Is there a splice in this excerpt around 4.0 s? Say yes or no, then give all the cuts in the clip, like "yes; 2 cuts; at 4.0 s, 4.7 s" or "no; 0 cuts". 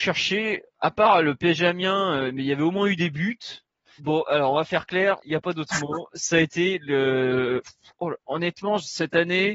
yes; 2 cuts; at 4.0 s, 5.2 s